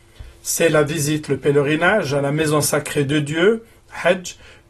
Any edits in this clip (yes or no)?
no